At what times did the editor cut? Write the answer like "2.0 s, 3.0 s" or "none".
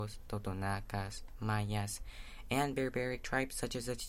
none